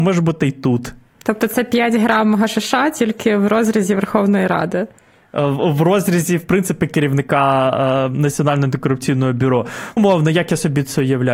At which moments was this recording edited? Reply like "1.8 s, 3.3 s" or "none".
10.0 s